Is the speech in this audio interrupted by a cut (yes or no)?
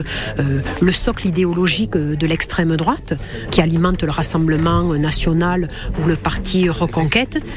yes